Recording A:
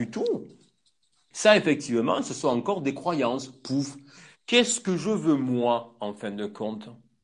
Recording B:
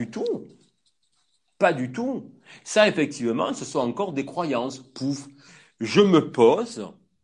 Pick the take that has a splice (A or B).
A